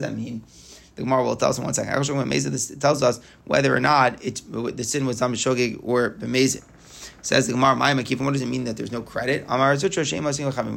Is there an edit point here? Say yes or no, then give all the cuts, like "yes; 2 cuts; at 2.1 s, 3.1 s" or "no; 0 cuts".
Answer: no; 0 cuts